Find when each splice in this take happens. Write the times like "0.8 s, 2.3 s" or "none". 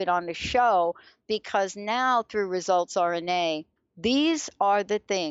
3.8 s